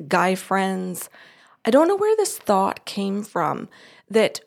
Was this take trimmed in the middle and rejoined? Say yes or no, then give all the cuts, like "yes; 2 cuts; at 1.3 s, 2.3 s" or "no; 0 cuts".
no; 0 cuts